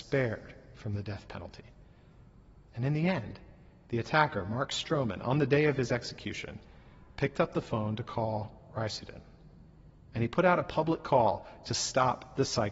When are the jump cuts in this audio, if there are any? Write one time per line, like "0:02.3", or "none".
0:10.0